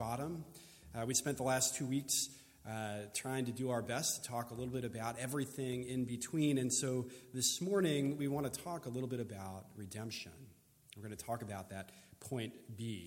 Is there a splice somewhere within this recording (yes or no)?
no